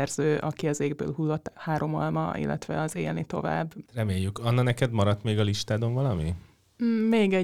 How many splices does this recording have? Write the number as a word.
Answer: one